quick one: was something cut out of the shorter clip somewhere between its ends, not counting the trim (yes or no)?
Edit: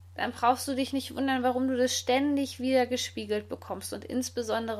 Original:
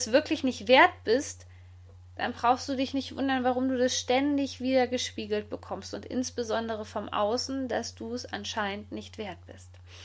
no